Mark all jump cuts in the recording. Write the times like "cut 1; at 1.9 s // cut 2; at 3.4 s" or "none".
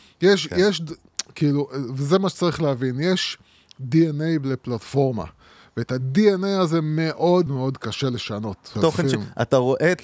cut 1; at 7.5 s // cut 2; at 8.8 s